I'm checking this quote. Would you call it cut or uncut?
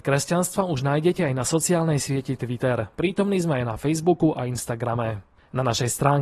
uncut